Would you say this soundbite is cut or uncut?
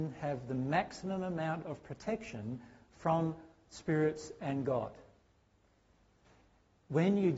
uncut